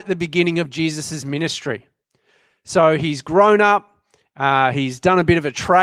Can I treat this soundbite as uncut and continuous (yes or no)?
yes